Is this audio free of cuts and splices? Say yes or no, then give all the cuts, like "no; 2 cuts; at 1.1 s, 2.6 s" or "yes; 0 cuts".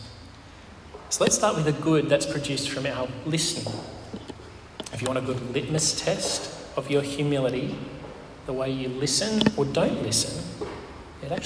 yes; 0 cuts